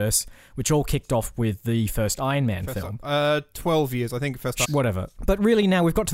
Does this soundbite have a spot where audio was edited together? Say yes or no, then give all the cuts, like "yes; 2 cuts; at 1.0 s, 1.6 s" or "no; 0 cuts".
yes; 1 cut; at 4.6 s